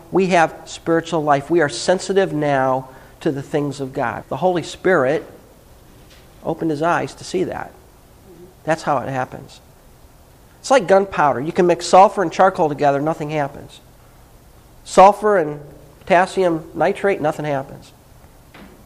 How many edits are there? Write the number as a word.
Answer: three